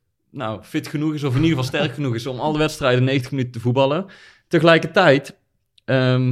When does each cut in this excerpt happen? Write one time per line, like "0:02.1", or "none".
none